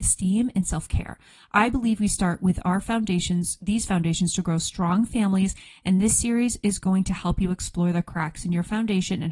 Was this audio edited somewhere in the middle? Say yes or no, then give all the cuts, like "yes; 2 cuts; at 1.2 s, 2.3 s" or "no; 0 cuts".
no; 0 cuts